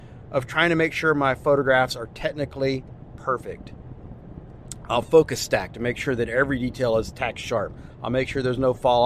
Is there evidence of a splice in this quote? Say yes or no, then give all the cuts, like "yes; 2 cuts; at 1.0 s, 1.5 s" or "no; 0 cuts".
no; 0 cuts